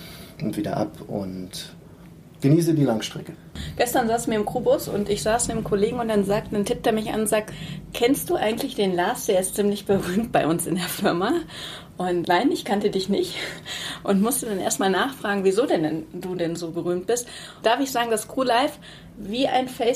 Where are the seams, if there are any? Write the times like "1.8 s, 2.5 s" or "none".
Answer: 12.2 s, 17.6 s